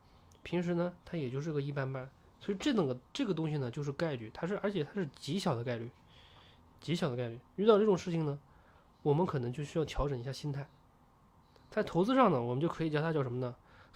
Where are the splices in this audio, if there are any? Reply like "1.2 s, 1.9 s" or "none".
none